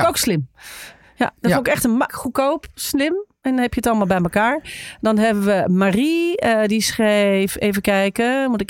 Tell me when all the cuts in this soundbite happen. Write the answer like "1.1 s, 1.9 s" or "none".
2.1 s